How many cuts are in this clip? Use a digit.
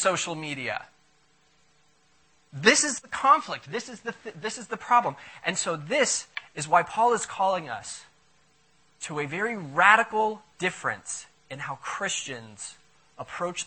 1